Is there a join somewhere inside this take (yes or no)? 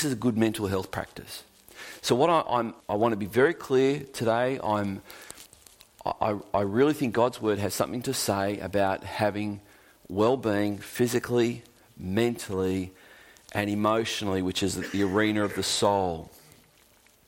yes